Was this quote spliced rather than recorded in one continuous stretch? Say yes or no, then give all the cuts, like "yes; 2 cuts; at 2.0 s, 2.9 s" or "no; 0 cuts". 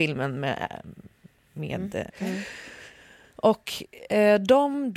yes; 1 cut; at 2.1 s